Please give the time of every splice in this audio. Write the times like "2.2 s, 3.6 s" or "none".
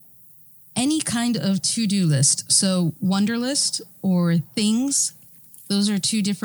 none